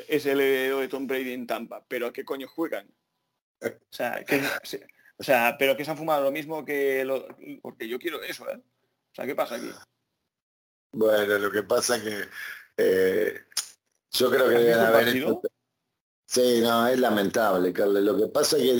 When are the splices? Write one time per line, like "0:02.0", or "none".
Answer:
0:07.6